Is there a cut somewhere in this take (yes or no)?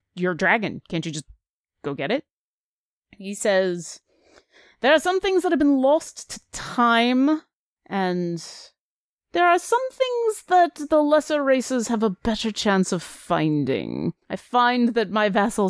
yes